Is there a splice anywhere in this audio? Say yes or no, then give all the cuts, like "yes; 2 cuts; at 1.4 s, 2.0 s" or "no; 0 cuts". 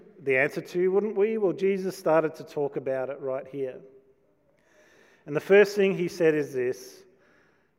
no; 0 cuts